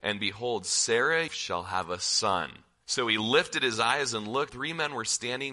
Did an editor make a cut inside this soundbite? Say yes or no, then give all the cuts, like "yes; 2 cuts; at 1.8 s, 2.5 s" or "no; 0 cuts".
yes; 3 cuts; at 1.3 s, 2.8 s, 4.5 s